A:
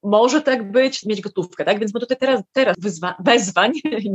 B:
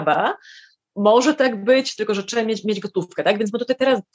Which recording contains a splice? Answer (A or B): A